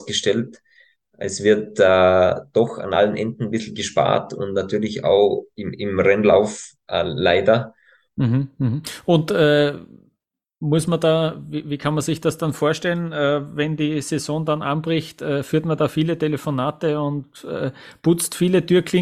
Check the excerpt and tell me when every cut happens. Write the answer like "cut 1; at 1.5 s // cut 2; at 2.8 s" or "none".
cut 1; at 8.1 s